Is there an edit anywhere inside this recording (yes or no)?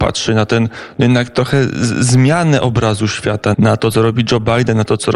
yes